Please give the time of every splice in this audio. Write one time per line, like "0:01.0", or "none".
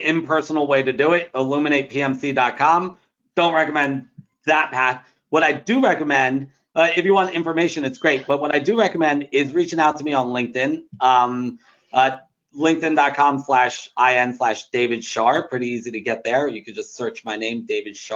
none